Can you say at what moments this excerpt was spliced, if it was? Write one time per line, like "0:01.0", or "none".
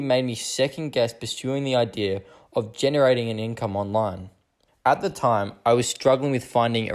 0:04.7